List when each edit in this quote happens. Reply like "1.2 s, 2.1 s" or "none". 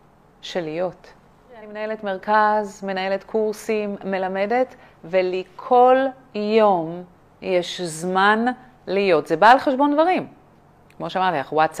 none

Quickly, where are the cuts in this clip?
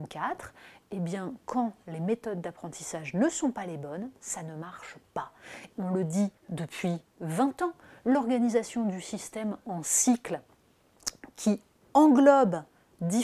5.7 s, 7.1 s

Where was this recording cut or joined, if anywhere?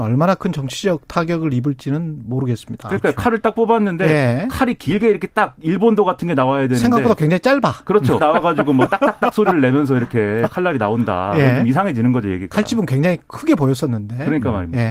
8.2 s

